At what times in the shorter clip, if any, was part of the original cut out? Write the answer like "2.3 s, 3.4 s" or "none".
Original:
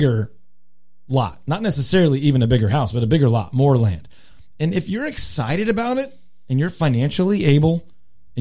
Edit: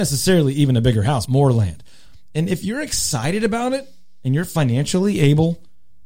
1.3 s